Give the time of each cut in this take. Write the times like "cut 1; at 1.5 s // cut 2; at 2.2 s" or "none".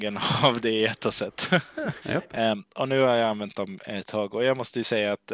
cut 1; at 2.0 s